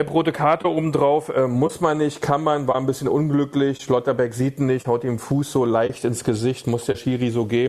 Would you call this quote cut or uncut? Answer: uncut